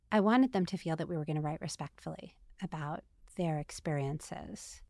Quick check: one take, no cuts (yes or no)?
yes